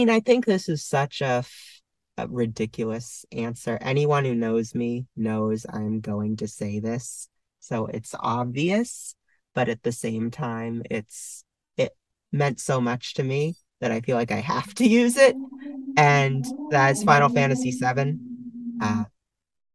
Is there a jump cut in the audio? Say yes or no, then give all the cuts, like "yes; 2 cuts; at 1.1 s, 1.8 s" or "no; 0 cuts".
no; 0 cuts